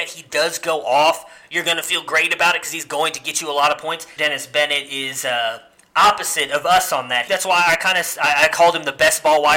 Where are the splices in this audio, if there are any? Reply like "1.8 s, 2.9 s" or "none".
4.2 s, 7.3 s